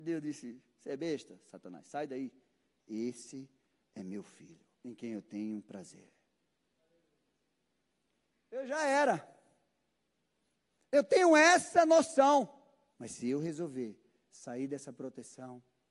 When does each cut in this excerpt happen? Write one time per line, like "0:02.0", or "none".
0:04.7
0:08.3
0:12.9